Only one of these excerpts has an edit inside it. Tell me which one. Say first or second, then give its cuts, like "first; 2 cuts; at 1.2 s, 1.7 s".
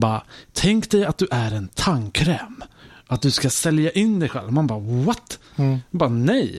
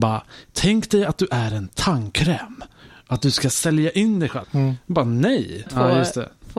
second; 2 cuts; at 4.4 s, 5.7 s